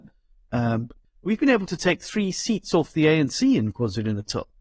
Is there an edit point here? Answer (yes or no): yes